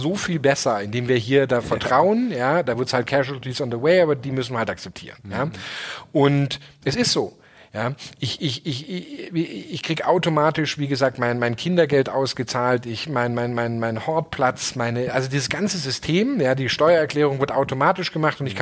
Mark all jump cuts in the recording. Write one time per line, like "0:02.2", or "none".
none